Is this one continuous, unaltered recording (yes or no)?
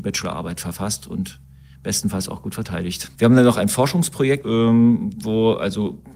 no